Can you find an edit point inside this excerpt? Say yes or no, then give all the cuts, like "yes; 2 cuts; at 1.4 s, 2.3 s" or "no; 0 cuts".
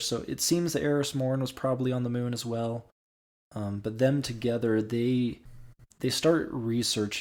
no; 0 cuts